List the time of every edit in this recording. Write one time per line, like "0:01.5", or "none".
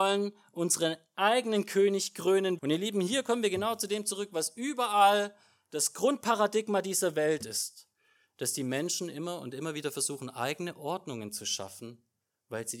0:02.6